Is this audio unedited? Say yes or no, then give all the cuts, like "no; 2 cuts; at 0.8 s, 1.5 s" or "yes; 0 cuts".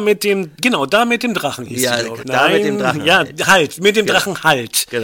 no; 1 cut; at 2.2 s